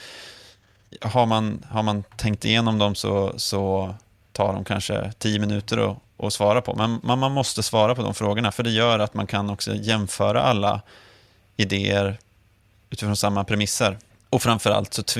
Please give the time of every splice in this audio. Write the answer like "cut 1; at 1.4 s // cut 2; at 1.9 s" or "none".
cut 1; at 14.1 s